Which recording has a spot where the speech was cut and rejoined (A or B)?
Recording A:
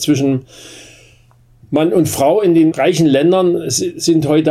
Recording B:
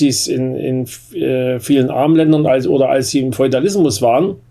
A